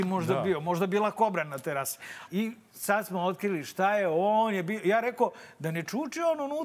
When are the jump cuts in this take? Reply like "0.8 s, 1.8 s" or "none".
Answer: 2.3 s